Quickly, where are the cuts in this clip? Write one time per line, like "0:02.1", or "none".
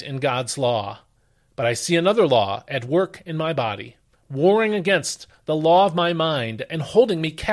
none